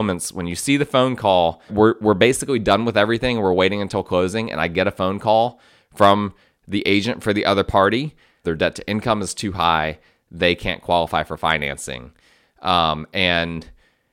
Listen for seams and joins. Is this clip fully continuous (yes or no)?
no